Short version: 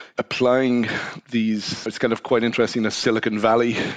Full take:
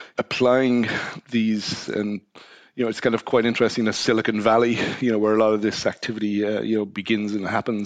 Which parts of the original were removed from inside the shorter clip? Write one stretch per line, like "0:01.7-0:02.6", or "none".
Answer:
0:01.9-0:02.9